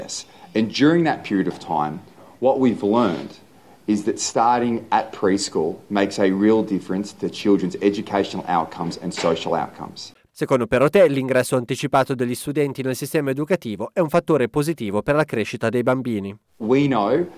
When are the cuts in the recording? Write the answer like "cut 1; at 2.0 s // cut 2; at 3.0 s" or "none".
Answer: cut 1; at 10.3 s